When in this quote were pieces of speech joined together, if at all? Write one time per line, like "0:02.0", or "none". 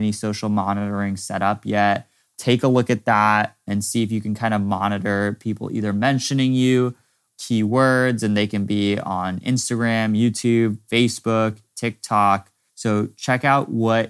0:07.3
0:12.7